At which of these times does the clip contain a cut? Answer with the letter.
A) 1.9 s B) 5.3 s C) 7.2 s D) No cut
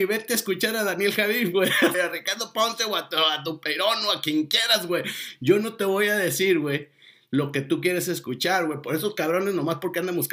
A